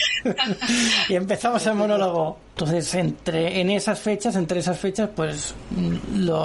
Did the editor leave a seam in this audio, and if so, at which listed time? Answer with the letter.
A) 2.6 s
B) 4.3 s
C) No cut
A